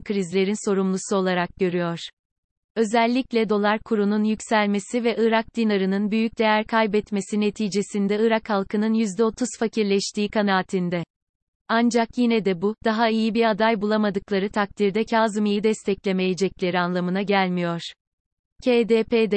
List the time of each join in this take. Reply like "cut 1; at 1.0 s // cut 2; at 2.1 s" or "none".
none